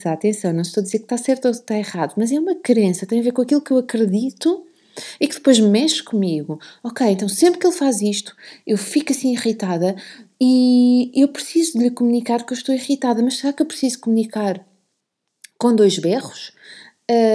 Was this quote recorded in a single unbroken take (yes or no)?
yes